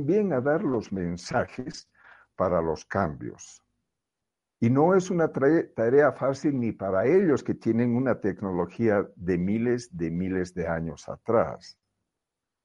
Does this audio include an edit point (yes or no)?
no